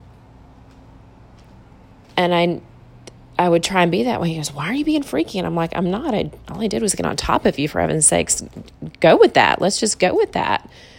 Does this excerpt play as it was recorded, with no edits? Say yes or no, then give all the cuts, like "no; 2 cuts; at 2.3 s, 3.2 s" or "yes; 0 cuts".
yes; 0 cuts